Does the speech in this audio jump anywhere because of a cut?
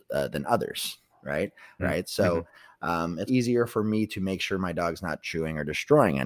yes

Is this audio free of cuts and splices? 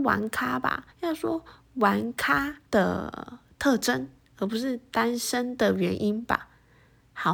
no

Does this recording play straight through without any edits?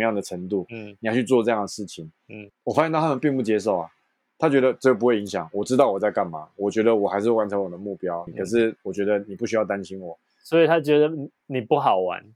no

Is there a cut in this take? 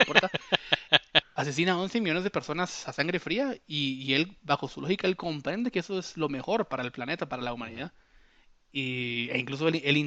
yes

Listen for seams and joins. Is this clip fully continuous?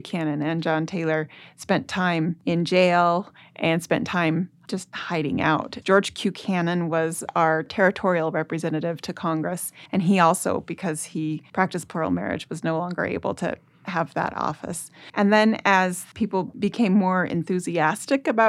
no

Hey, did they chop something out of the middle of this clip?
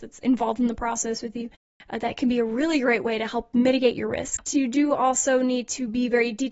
yes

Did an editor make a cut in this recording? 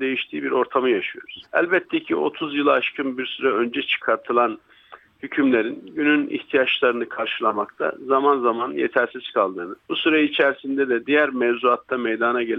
yes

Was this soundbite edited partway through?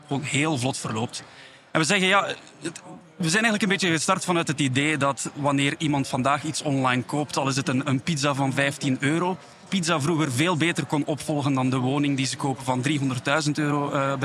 yes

